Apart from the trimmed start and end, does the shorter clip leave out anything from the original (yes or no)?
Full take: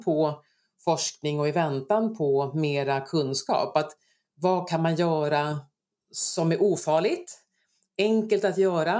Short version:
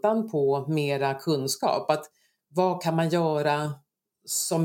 no